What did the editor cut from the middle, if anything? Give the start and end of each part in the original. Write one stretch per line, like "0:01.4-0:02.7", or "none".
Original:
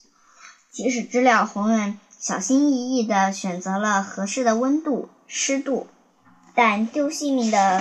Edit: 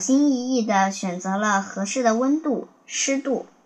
none